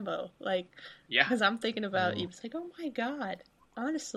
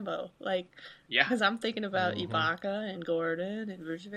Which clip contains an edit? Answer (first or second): first